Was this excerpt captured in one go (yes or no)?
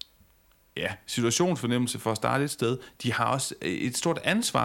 yes